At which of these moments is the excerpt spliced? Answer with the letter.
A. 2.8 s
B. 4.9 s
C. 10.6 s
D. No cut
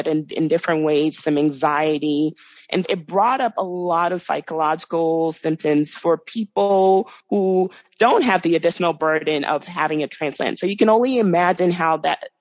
A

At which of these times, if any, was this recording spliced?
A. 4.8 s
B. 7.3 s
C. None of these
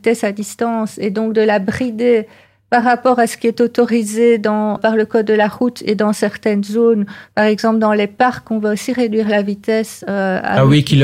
A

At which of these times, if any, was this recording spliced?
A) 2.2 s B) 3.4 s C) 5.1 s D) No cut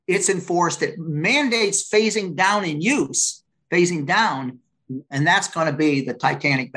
C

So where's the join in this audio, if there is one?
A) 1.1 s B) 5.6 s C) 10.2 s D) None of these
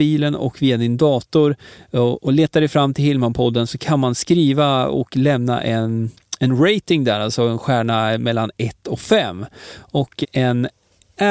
C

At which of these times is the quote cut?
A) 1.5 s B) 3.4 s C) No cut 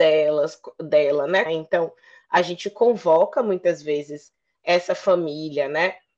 A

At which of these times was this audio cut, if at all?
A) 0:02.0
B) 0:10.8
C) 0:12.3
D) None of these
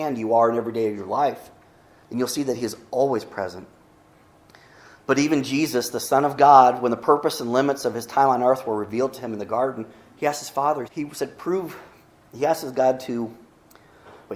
B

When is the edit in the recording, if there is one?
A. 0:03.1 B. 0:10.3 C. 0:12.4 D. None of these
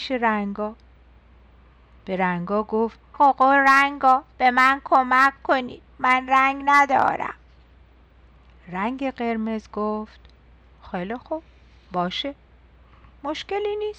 A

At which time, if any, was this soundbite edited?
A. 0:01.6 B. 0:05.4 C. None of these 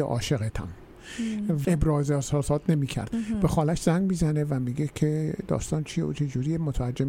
A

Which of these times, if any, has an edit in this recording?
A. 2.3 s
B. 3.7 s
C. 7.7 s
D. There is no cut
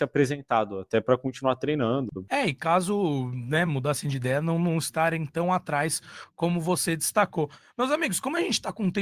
D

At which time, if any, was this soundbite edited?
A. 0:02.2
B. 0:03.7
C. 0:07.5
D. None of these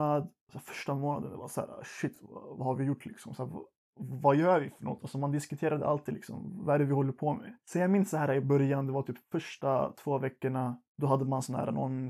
D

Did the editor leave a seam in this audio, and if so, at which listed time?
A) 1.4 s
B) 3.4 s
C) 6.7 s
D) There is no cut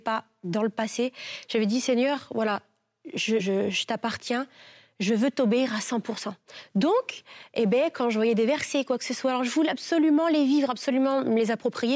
B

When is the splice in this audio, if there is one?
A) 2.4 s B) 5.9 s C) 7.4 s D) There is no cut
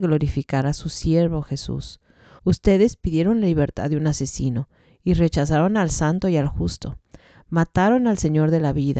A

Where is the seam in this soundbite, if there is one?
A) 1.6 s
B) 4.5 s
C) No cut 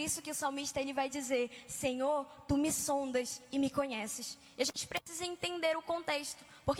C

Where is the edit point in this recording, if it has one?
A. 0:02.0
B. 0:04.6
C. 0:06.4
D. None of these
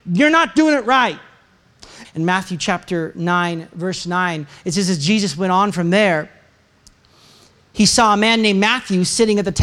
A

